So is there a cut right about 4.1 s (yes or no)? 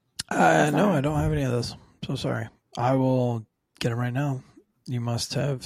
no